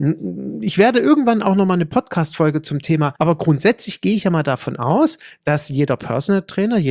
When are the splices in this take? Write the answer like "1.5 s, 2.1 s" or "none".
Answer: 3.2 s